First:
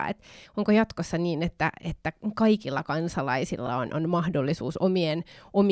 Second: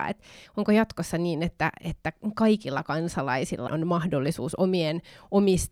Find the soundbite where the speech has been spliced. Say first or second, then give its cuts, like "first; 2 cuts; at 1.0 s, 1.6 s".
second; 1 cut; at 3.7 s